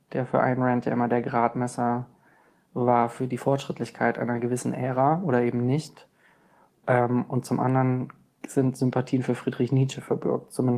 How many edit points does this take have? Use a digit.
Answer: 0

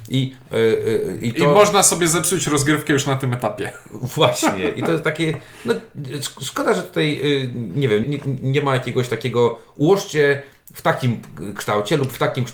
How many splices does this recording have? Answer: 1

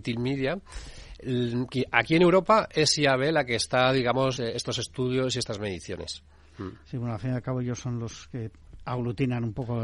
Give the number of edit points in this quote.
1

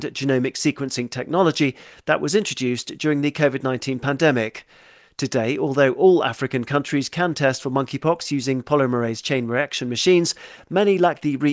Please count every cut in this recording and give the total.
0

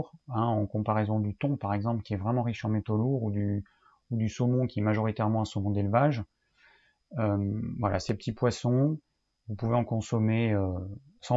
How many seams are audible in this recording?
0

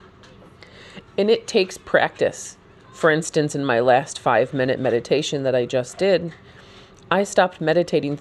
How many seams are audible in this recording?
0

